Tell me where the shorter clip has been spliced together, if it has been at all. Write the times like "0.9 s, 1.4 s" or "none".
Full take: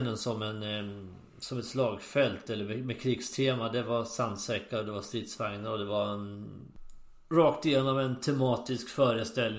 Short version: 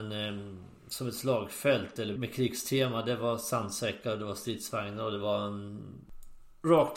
2.2 s